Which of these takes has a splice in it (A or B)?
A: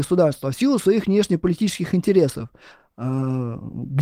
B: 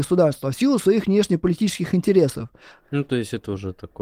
B